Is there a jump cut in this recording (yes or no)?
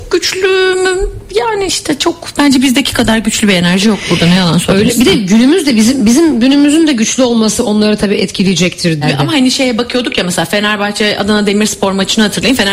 yes